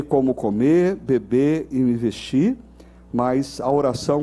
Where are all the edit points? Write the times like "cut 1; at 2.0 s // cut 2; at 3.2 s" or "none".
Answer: none

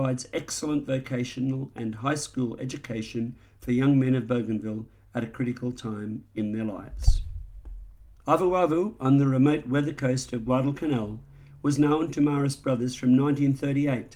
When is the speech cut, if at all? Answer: cut 1; at 8.2 s

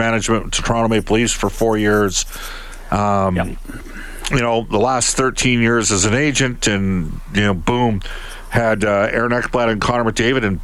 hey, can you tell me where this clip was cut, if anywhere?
none

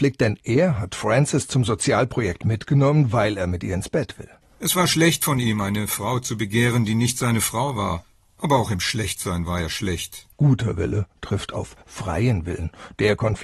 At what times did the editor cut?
cut 1; at 10.3 s

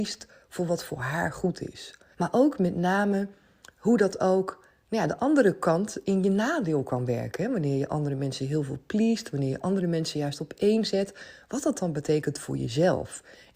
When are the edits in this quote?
cut 1; at 2.1 s

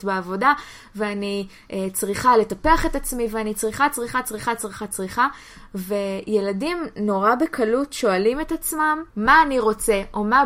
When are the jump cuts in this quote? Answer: cut 1; at 9.1 s

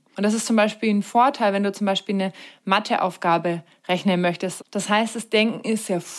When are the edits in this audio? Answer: cut 1; at 4.6 s

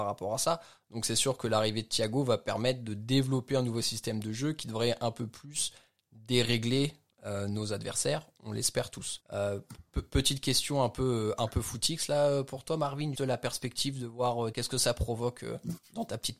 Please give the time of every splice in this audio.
cut 1; at 9.2 s // cut 2; at 13.1 s // cut 3; at 14.5 s

